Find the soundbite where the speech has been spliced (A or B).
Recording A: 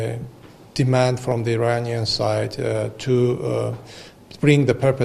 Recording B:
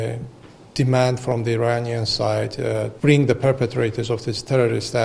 B